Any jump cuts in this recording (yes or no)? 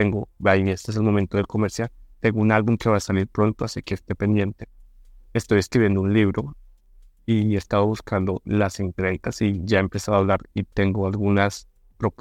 no